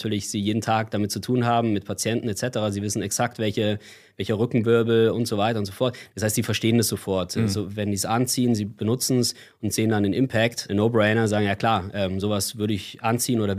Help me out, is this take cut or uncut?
cut